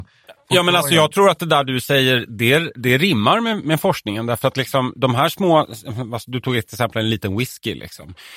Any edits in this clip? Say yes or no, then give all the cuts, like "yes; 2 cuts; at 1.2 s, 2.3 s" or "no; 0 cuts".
yes; 1 cut; at 2.3 s